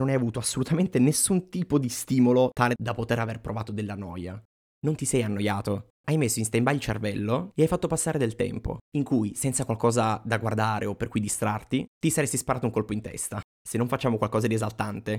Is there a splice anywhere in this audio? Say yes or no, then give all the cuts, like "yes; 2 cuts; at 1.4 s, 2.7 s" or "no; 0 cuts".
yes; 2 cuts; at 4.6 s, 13.5 s